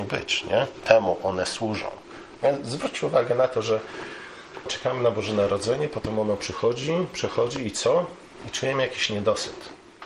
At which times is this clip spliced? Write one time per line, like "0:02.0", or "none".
0:04.7